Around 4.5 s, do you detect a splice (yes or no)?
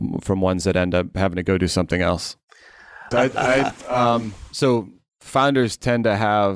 no